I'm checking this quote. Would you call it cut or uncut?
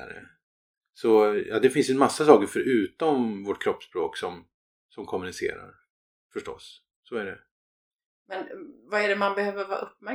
uncut